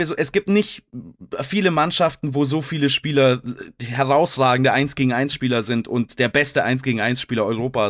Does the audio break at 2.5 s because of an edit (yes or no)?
no